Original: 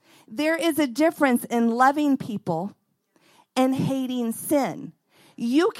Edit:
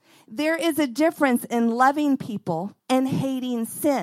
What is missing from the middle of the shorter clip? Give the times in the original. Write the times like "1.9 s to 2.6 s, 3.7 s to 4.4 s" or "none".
2.8 s to 3.5 s